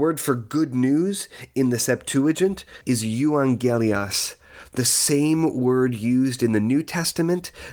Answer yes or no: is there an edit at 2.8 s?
yes